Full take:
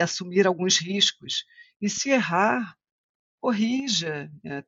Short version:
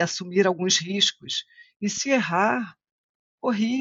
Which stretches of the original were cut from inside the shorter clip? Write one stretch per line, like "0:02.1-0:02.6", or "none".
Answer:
none